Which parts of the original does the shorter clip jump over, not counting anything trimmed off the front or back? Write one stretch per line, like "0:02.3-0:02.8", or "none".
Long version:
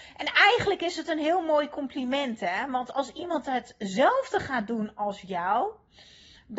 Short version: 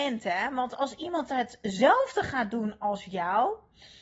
none